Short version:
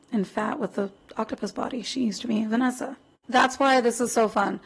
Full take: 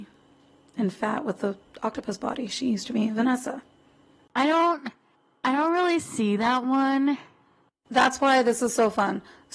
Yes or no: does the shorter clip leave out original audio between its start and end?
yes